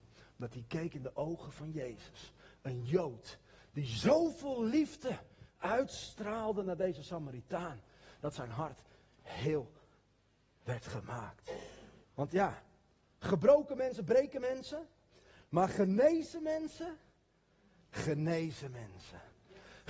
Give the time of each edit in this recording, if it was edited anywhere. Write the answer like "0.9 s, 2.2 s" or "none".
12.0 s